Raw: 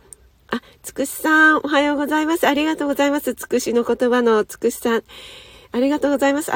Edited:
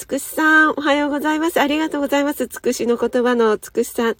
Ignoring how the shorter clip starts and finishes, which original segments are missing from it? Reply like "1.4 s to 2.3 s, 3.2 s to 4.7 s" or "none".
none